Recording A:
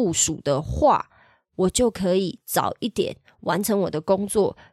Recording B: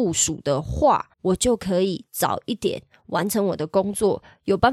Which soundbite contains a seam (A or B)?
B